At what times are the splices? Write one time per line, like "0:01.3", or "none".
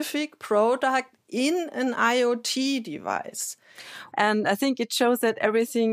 0:04.1